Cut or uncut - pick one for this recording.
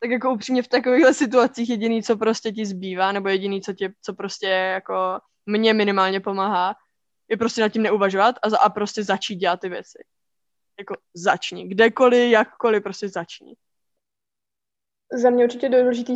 cut